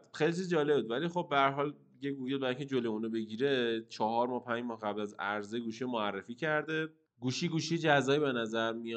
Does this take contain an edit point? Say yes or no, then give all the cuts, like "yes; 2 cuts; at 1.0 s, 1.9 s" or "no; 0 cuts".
no; 0 cuts